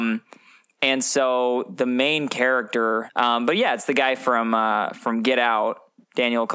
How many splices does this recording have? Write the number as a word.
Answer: one